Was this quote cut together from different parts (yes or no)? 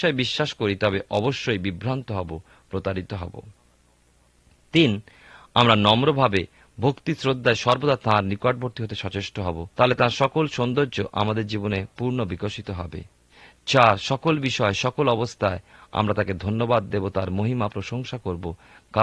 yes